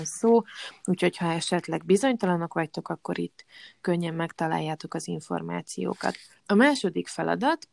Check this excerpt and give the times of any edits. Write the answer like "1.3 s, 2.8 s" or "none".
6.4 s